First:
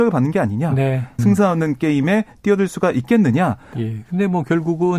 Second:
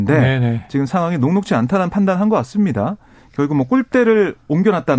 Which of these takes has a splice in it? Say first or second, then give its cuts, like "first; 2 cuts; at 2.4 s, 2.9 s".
first; 2 cuts; at 1.2 s, 3.7 s